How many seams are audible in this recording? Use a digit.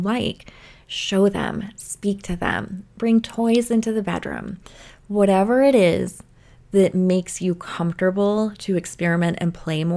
0